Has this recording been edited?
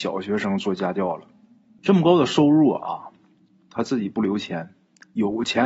yes; 1 cut; at 1.8 s

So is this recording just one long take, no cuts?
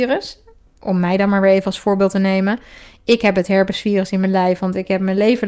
yes; 0 cuts

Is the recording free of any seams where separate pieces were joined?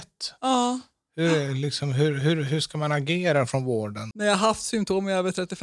no; 1 cut; at 4.1 s

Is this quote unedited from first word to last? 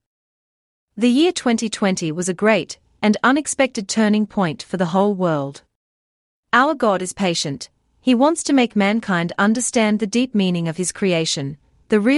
no; 1 cut; at 6.3 s

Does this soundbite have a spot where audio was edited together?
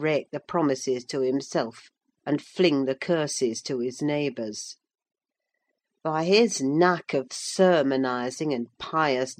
no; 0 cuts

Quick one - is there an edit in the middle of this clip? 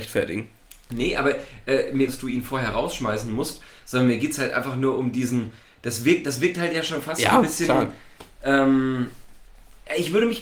yes; 1 cut; at 2.1 s

